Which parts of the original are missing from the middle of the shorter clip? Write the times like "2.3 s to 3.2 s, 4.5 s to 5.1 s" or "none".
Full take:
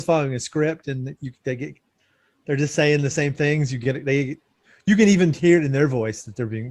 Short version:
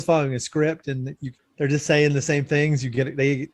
1.4 s to 2.3 s

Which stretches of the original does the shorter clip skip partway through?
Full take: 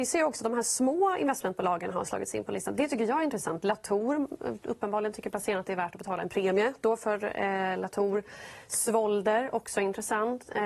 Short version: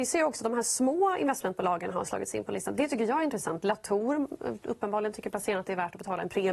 none

